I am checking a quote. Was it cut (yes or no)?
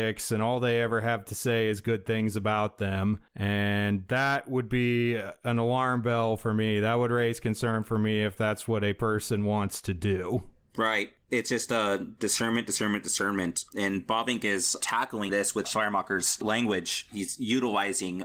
yes